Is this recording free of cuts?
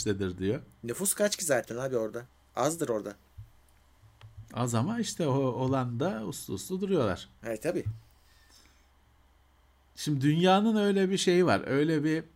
yes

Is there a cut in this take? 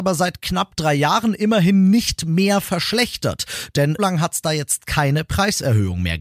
yes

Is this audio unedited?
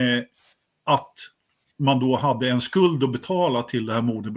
yes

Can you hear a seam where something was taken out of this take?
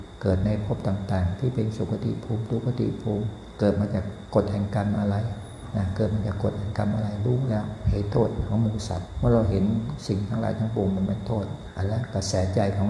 no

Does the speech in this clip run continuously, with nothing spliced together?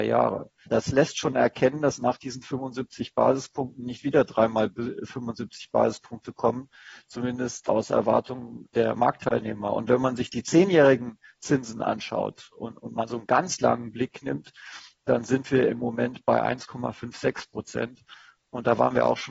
yes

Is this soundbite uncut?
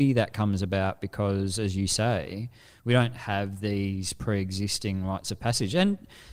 yes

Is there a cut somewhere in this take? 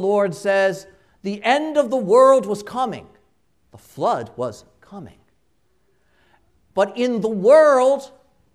no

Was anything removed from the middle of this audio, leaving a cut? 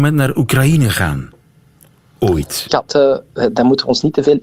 yes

